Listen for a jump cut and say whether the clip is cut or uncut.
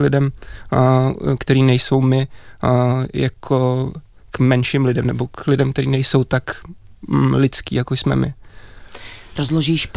uncut